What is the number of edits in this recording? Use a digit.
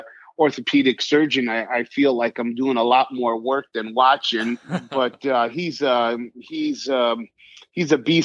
0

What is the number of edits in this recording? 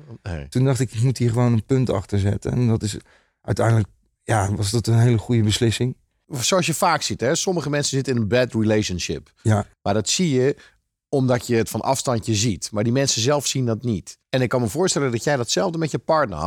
1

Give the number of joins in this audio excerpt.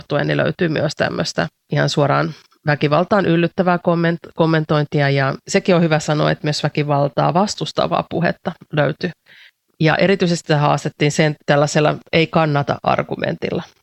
0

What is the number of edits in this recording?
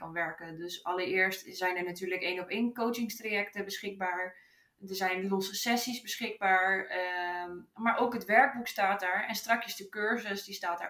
0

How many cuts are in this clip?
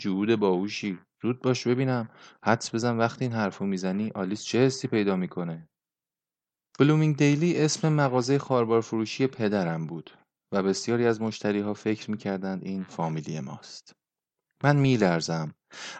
0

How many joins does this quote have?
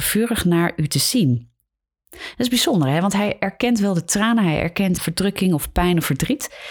2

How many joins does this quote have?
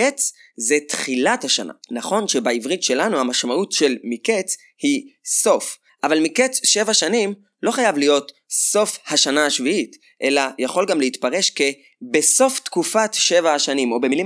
1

